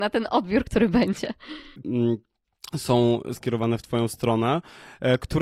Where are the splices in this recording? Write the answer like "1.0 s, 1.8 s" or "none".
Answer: 1.8 s, 3.3 s

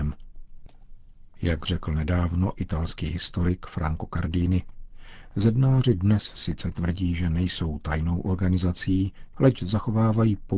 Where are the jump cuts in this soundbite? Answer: 9.3 s

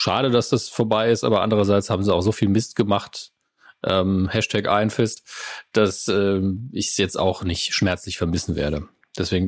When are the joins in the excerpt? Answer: none

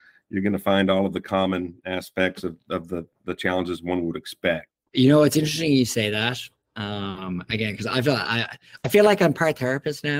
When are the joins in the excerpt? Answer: 4.7 s

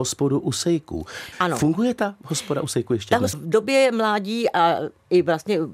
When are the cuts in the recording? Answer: 1.3 s, 3.3 s

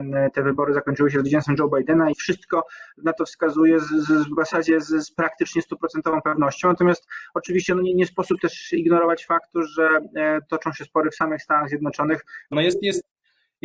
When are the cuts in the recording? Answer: 2.1 s, 12.5 s

